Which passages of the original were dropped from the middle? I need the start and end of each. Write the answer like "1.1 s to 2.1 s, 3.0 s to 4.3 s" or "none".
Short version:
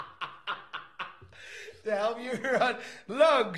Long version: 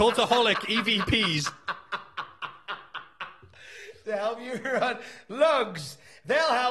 none